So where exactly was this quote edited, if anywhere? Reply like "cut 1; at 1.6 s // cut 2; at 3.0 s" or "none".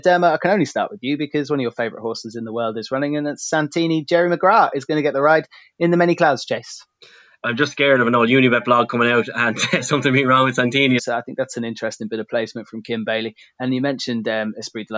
cut 1; at 7.4 s // cut 2; at 11.0 s